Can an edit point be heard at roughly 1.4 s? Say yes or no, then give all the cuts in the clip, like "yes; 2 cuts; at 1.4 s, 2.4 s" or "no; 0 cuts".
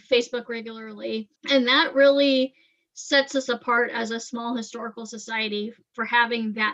yes; 1 cut; at 1.4 s